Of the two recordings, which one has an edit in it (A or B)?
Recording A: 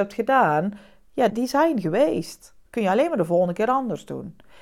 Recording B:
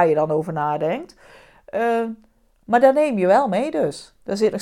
A